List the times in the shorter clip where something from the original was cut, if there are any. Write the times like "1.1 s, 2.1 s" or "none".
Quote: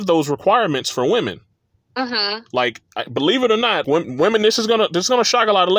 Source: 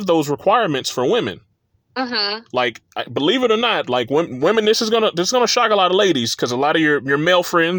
3.8 s

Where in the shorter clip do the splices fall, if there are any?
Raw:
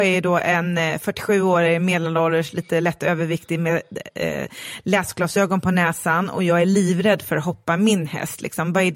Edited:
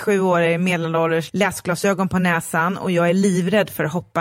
1.3 s

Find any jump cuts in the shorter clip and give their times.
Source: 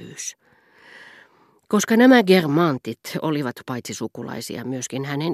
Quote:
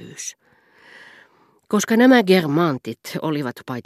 none

